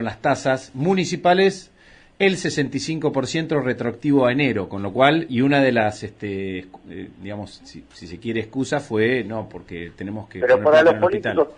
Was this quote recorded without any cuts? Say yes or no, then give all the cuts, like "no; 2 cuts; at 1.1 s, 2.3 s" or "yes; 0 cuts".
yes; 0 cuts